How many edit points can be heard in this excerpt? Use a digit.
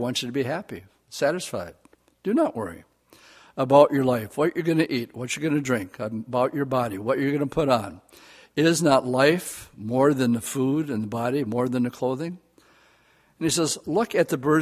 0